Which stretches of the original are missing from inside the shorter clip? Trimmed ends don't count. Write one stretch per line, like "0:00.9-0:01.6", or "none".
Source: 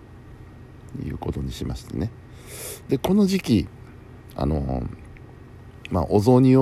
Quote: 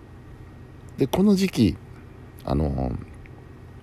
0:00.9-0:02.8